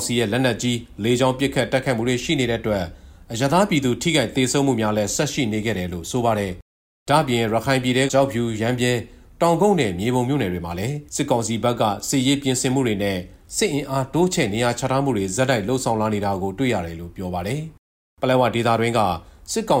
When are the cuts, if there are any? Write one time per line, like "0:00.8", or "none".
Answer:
0:08.1
0:11.1